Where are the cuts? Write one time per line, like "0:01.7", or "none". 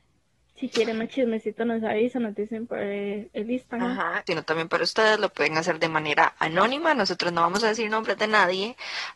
0:04.3

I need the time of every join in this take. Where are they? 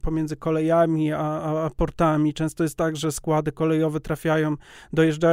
none

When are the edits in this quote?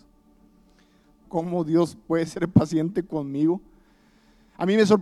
0:01.2

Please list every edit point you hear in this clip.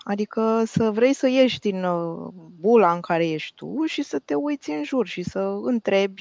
none

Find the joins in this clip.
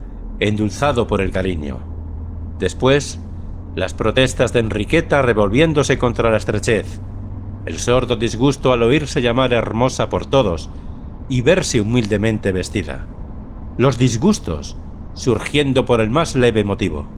none

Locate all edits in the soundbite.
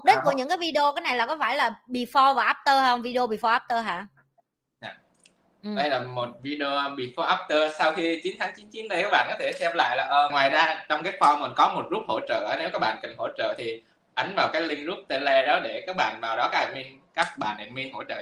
0:10.3

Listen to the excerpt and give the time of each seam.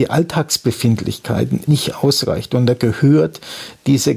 0:01.7

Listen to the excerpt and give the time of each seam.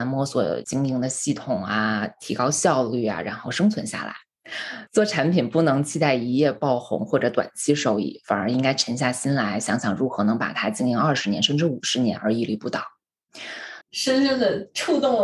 0:13.8

